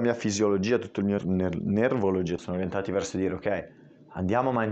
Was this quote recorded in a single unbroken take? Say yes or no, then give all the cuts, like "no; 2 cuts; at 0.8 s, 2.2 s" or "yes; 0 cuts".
no; 2 cuts; at 1.2 s, 2.4 s